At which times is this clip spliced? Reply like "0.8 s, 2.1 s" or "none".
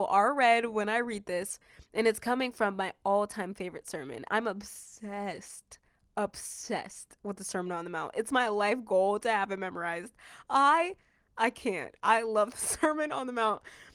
4.3 s